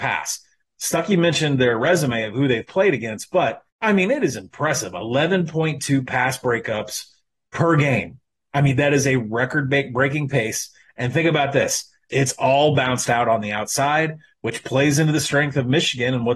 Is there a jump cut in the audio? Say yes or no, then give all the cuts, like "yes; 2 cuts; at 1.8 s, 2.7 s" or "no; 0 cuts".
yes; 2 cuts; at 3.7 s, 12.1 s